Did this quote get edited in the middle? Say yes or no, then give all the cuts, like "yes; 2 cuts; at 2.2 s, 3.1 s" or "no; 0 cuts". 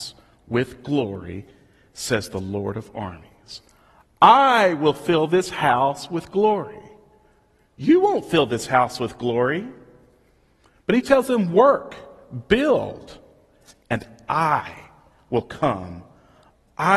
no; 0 cuts